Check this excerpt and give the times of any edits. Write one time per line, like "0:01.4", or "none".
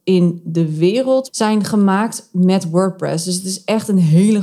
none

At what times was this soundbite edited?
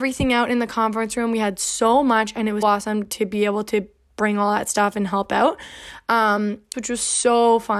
0:02.6
0:06.7

